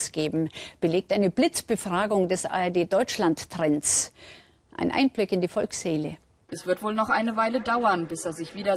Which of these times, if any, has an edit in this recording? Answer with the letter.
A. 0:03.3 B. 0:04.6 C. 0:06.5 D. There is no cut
C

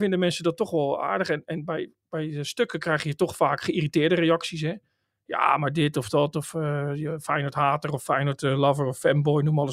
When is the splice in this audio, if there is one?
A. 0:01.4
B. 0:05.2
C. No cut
C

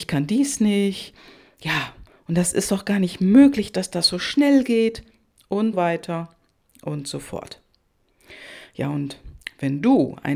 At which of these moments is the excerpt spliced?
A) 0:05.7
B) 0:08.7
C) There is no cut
A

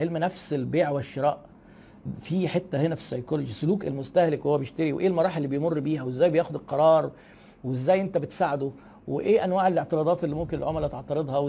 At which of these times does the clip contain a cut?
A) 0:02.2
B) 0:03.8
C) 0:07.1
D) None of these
B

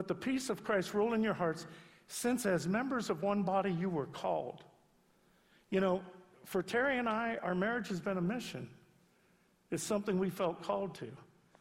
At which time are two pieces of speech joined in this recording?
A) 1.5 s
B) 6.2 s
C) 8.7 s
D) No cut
D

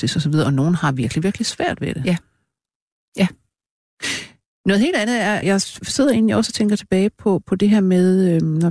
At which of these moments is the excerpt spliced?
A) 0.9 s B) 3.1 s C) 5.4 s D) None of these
C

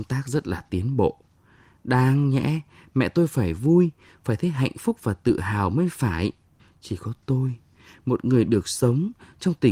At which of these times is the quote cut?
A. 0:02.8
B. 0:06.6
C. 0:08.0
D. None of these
B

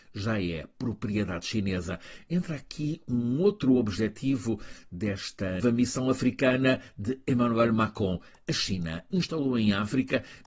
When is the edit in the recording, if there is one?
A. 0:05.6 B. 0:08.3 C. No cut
A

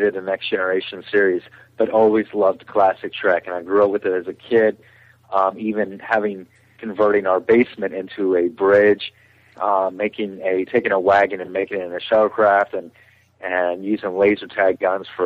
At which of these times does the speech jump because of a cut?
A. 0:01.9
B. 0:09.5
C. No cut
C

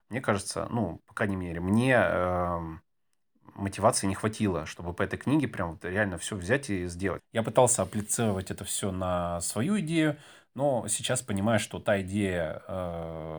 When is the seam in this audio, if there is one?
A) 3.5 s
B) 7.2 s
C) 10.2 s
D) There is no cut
B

